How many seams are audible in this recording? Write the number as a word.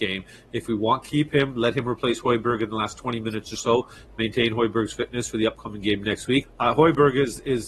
one